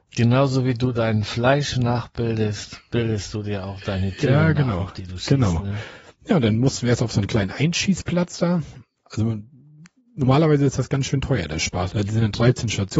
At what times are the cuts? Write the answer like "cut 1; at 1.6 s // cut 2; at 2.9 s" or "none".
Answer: cut 1; at 11.9 s